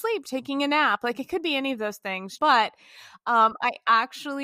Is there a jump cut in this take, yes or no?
yes